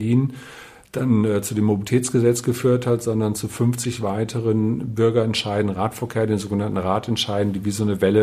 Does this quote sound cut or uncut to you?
uncut